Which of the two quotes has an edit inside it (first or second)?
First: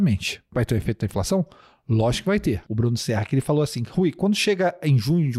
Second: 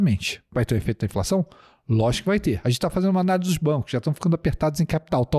first